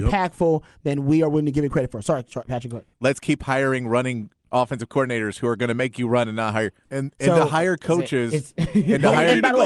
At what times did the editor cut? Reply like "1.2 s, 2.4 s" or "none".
2.9 s, 6.8 s